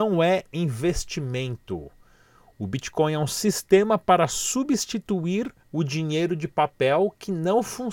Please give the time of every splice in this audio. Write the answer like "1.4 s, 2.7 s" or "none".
5.6 s

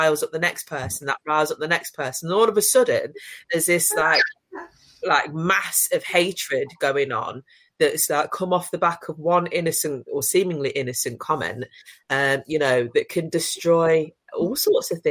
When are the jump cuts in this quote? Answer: none

